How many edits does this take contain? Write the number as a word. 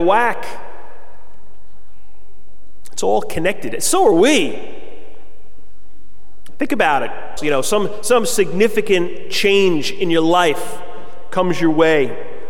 one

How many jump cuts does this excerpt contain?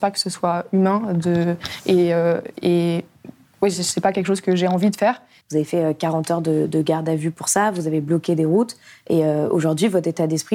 one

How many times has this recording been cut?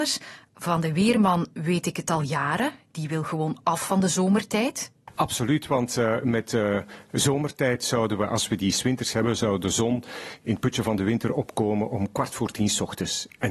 zero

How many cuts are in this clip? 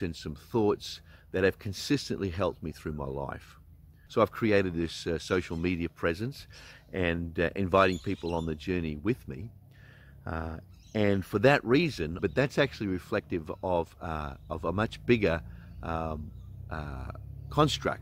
two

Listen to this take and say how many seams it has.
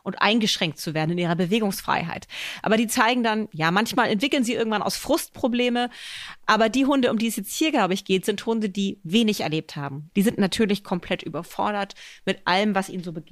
one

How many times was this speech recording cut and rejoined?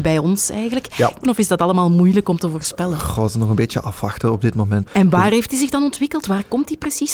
two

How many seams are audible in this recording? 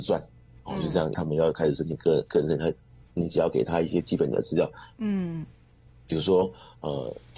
two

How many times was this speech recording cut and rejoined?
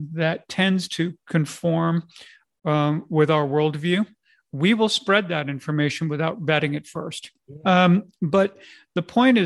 one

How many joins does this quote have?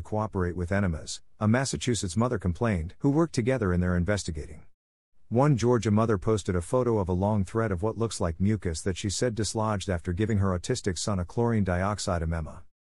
one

